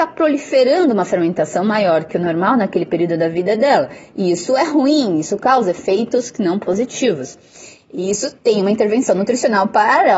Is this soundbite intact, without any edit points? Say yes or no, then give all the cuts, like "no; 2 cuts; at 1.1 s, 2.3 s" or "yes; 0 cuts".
yes; 0 cuts